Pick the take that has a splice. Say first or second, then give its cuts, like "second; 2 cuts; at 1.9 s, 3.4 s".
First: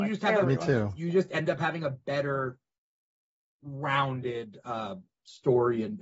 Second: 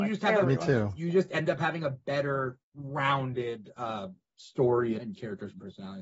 second; 2 cuts; at 2.6 s, 5.0 s